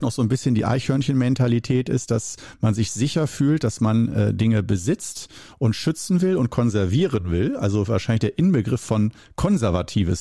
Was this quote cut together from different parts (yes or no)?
no